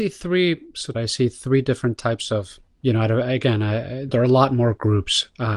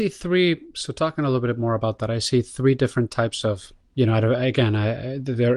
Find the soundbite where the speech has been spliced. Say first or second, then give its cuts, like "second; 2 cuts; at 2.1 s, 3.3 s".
first; 2 cuts; at 0.9 s, 4.1 s